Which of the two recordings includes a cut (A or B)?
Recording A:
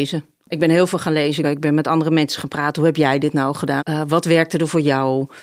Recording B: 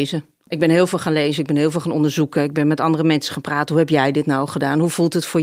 A